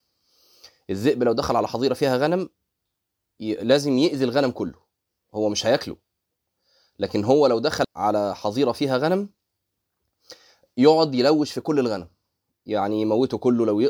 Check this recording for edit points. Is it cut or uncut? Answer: cut